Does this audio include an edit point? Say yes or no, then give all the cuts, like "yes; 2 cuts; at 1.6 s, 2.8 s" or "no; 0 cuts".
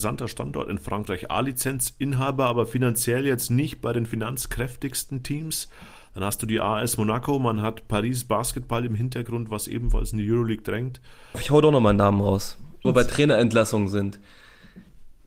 yes; 2 cuts; at 11.3 s, 12.8 s